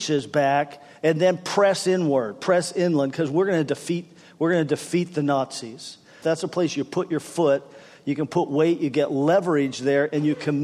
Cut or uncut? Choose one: cut